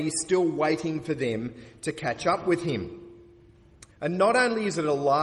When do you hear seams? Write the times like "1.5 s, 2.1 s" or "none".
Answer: 3.9 s